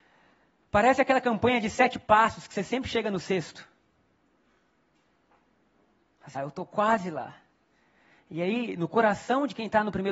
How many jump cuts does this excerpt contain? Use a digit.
1